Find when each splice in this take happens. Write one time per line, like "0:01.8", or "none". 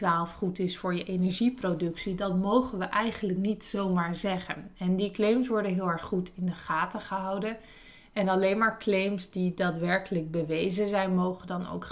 none